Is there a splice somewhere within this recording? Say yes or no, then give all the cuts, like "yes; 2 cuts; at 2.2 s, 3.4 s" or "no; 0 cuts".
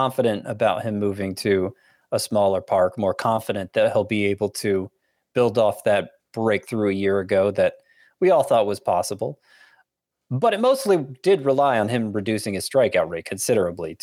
no; 0 cuts